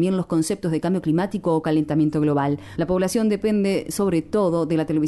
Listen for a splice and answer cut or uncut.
cut